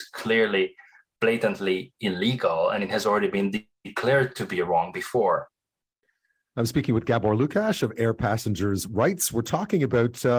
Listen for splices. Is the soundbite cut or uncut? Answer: uncut